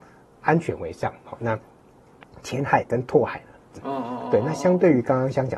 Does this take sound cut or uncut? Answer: cut